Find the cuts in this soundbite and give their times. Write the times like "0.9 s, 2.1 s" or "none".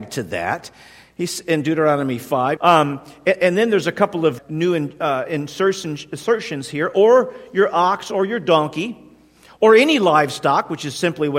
2.6 s, 4.4 s